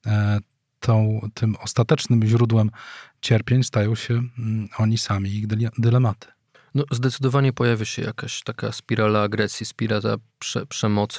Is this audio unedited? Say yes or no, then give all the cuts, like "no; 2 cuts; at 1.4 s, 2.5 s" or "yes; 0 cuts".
yes; 0 cuts